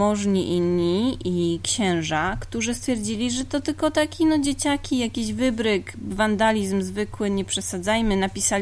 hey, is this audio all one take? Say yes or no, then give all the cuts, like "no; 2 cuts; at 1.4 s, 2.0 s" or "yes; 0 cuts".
yes; 0 cuts